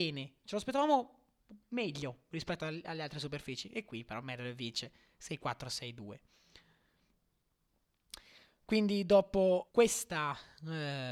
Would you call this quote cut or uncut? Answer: cut